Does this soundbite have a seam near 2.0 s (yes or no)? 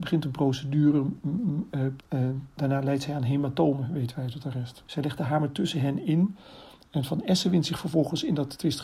yes